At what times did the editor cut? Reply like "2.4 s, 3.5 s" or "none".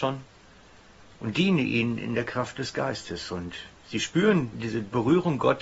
4.5 s